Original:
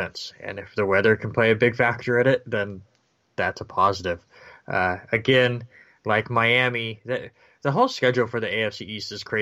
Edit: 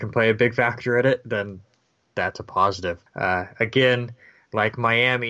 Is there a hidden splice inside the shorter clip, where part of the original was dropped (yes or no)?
yes